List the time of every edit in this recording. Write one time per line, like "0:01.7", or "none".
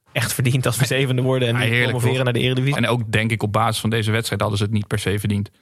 0:02.7